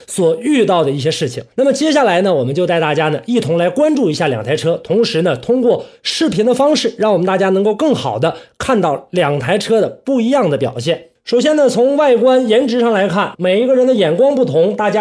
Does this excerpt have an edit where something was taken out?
yes; 2 cuts; at 1.5 s, 13.3 s

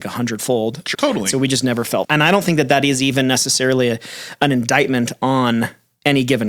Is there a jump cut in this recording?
yes; 2 cuts; at 0.9 s, 2.0 s

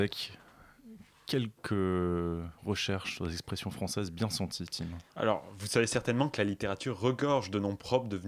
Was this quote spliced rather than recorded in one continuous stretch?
yes; 1 cut; at 5.1 s

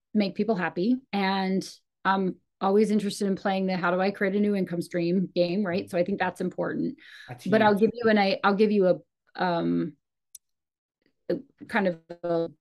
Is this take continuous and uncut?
no; 1 cut; at 1.0 s

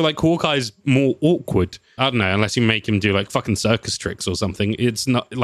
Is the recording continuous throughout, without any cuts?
no; 1 cut; at 2.0 s

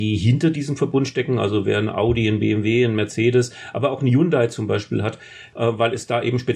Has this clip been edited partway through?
yes; 1 cut; at 5.5 s

